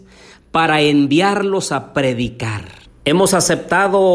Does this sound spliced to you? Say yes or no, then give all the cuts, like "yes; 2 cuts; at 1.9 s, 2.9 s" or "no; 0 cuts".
yes; 1 cut; at 2.9 s